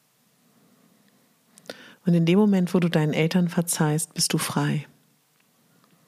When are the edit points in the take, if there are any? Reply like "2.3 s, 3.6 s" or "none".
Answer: 1.9 s